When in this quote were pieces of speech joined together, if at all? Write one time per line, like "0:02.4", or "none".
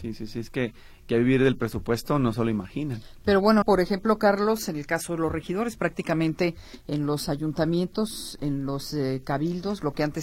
0:03.6